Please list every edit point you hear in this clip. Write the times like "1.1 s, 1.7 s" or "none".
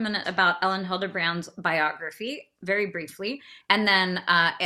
3.6 s

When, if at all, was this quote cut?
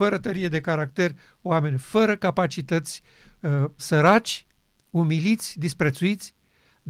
3.8 s

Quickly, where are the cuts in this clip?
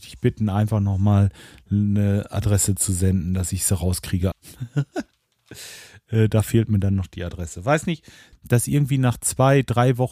4.3 s, 8.3 s

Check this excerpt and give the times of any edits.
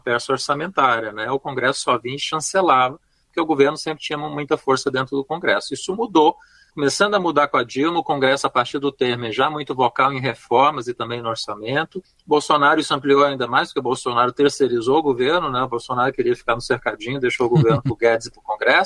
none

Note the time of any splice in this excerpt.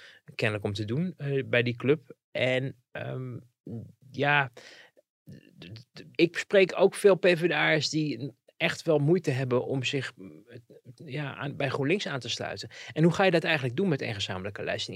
6.1 s

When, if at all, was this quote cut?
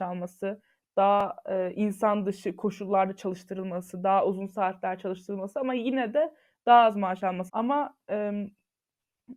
7.5 s

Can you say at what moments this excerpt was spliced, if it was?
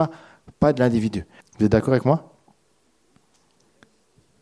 1.4 s

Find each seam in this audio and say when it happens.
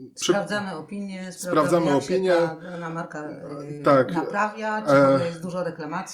none

